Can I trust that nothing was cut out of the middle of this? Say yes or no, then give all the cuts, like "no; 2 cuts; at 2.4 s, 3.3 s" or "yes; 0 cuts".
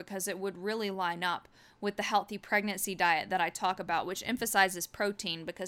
yes; 0 cuts